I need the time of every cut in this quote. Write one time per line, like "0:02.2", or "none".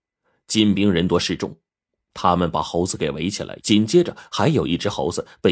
0:03.6